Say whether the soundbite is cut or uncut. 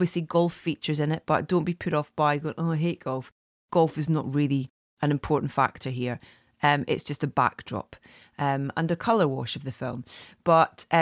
uncut